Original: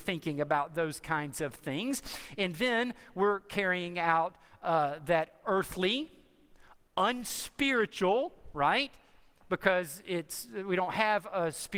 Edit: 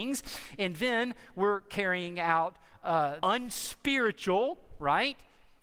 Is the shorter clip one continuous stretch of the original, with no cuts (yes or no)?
no